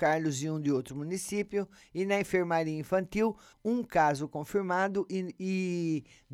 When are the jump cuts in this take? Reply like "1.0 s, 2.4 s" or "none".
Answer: 3.5 s

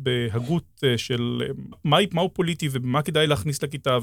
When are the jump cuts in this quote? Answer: 1.7 s

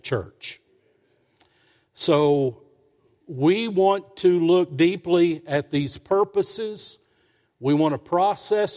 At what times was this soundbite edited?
none

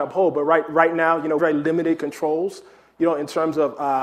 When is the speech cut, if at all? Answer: 1.4 s

